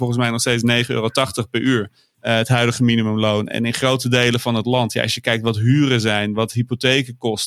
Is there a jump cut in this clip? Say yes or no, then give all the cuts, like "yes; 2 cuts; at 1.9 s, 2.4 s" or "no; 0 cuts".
no; 0 cuts